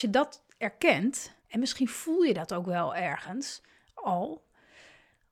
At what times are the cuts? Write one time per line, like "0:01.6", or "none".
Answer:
0:01.4

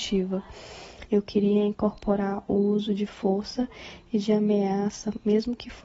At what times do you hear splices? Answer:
none

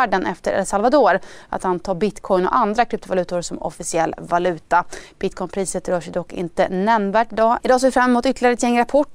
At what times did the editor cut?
0:07.6

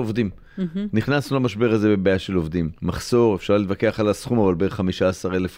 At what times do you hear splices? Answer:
0:02.8

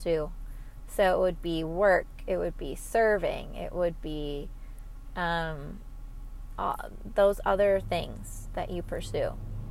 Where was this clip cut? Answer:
none

